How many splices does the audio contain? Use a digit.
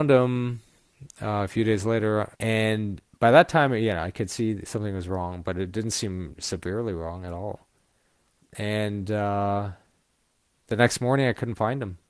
1